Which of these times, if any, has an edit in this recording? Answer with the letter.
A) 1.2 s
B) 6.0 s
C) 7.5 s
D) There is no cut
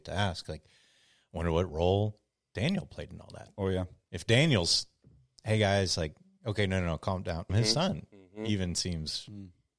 C